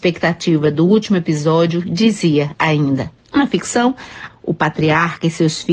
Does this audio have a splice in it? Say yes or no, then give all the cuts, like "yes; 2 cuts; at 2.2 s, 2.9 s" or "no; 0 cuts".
yes; 2 cuts; at 3.2 s, 4.3 s